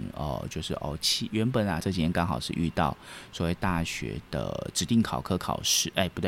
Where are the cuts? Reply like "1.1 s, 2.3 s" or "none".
1.8 s